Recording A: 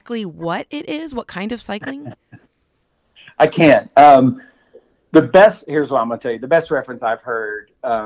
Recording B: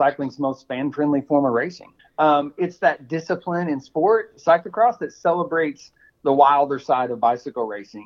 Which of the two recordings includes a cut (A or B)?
B